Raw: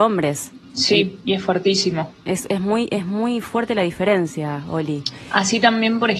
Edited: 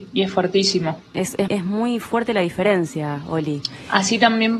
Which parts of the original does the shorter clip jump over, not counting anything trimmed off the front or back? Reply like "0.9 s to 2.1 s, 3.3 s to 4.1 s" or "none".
2.6 s to 2.9 s